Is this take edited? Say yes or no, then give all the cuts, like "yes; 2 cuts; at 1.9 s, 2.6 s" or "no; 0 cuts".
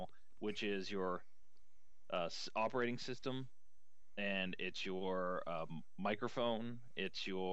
no; 0 cuts